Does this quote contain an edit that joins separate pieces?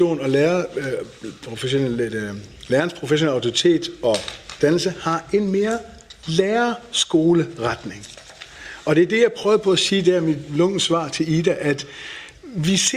no; 0 cuts

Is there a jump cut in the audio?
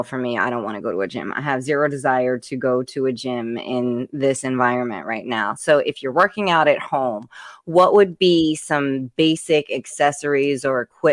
no; 0 cuts

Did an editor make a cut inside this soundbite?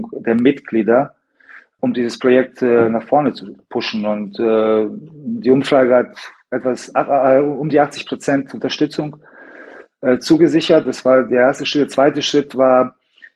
no; 0 cuts

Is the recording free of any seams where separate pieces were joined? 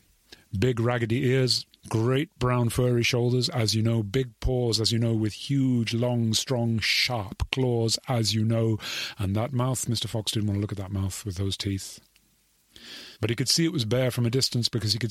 no; 2 cuts; at 1.8 s, 13.2 s

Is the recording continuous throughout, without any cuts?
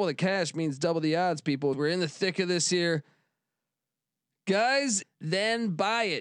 no; 2 cuts; at 1.7 s, 5.0 s

